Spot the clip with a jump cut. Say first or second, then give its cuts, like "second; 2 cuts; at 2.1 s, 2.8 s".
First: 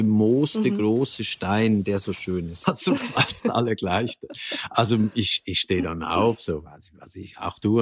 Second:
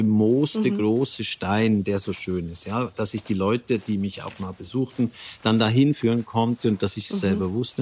first; 1 cut; at 2.6 s